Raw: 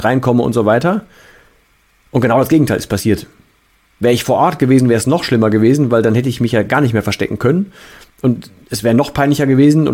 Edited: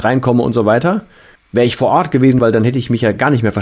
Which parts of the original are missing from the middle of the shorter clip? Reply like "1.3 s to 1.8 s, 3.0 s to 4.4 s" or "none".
1.4 s to 3.8 s, 4.9 s to 5.9 s